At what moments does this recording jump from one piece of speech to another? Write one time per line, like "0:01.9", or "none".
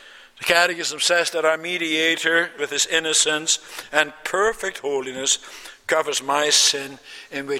0:02.6